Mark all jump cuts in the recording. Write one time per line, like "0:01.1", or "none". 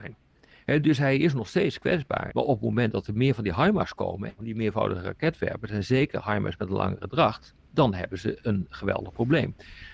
0:02.3
0:04.4